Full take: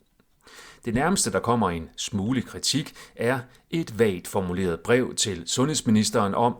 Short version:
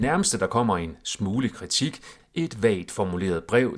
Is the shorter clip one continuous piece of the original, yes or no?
no